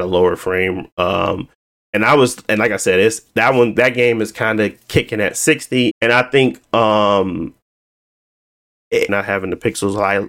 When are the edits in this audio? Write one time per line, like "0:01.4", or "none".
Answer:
0:05.9
0:09.1